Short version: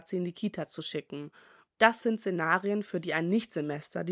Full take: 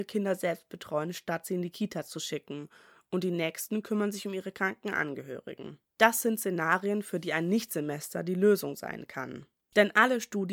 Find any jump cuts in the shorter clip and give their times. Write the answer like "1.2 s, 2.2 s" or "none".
1.7 s